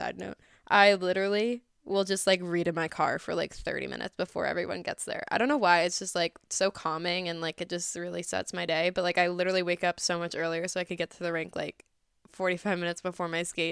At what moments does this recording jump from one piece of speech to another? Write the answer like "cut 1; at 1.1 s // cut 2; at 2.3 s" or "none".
none